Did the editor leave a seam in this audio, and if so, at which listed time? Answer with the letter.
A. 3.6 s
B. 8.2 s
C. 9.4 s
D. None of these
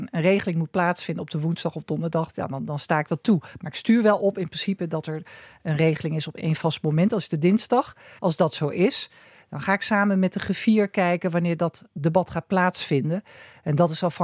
B